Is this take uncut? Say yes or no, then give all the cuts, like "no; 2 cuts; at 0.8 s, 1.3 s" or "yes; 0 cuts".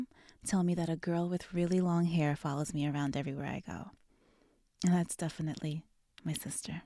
yes; 0 cuts